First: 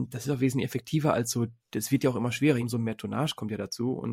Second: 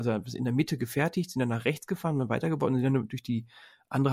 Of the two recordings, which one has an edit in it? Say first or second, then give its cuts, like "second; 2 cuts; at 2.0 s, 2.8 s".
first; 2 cuts; at 1.6 s, 2.6 s